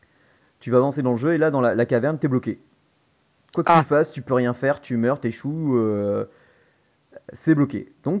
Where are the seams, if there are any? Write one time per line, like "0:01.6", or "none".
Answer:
none